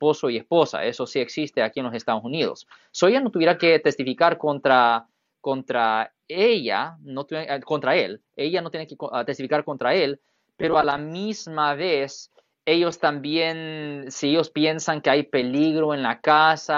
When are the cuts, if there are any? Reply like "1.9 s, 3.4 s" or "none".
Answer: none